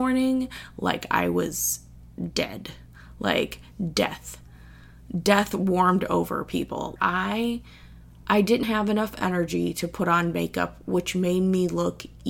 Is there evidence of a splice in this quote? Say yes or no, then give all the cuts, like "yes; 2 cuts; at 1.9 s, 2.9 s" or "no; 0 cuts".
yes; 2 cuts; at 7.0 s, 8.6 s